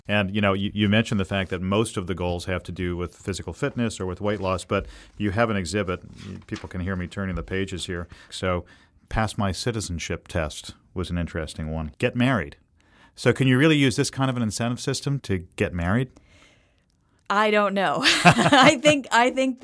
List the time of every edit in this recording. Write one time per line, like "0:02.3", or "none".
0:08.3
0:11.9
0:15.2